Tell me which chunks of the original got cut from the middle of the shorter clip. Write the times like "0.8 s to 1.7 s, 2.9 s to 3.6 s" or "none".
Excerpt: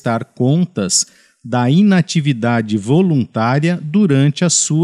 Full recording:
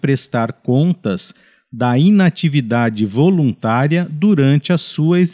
none

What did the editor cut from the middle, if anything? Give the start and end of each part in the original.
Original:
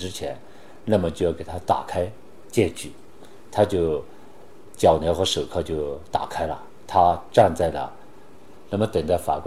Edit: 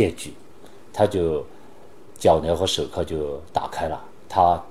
none

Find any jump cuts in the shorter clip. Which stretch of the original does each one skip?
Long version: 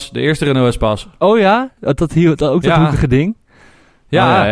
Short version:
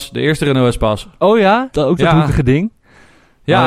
1.7 s to 2.4 s

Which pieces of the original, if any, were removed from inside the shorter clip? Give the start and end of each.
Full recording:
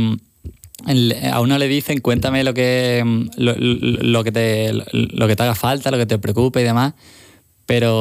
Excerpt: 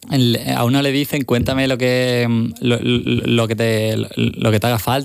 none

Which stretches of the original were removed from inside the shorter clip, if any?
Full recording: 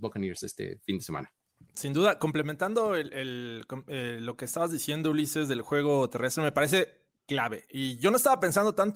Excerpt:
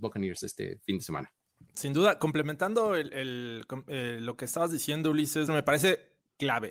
5.5 s to 6.4 s

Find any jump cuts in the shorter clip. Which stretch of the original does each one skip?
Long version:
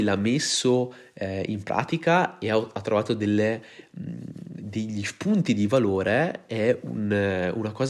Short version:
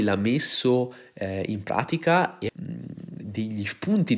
2.5 s to 3.9 s

